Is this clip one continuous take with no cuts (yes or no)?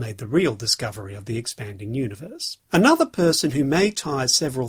no